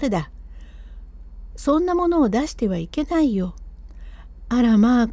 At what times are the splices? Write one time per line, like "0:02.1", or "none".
0:01.5